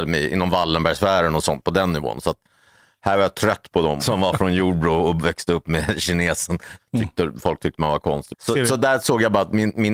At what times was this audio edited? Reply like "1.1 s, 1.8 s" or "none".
4.0 s, 6.8 s, 8.3 s